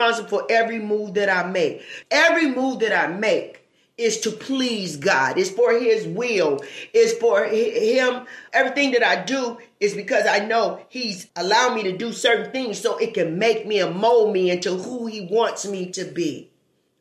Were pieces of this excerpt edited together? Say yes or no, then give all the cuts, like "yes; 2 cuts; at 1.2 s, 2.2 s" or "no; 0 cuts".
yes; 3 cuts; at 2.0 s, 8.5 s, 11.3 s